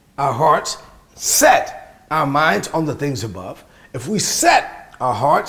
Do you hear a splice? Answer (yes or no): no